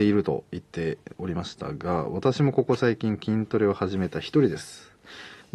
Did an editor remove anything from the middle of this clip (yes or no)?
no